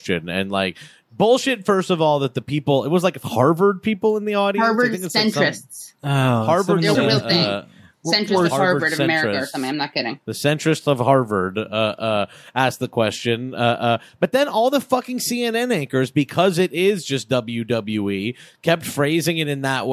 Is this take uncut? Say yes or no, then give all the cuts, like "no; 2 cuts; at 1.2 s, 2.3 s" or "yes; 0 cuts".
no; 1 cut; at 6.9 s